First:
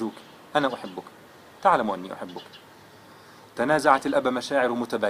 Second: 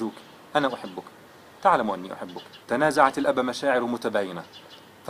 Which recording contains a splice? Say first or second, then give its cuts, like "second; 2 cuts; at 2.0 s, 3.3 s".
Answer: second; 1 cut; at 2.6 s